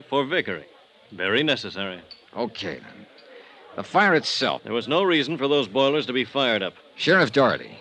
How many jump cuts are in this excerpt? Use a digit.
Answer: 2